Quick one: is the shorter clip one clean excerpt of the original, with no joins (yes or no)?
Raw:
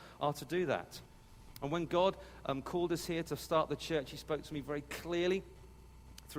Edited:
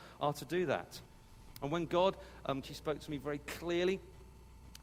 no